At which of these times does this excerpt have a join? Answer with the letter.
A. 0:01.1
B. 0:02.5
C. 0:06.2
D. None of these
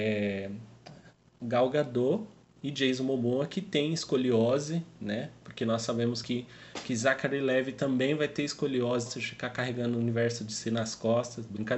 D